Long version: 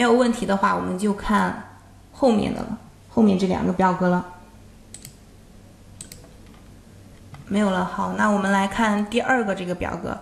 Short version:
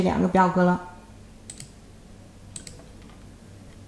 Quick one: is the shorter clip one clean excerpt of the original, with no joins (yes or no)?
yes